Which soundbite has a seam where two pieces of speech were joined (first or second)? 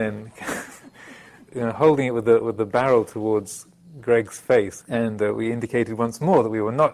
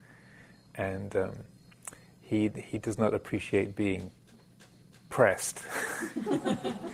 first